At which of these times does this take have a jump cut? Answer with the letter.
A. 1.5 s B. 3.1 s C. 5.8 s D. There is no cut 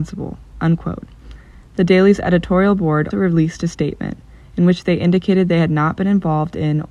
B